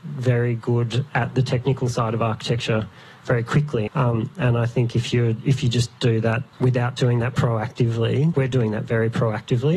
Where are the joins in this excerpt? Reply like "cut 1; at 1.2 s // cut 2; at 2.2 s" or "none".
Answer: cut 1; at 3.9 s // cut 2; at 6.5 s // cut 3; at 8.3 s